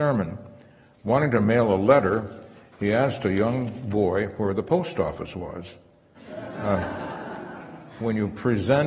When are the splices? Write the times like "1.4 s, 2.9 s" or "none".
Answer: 6.1 s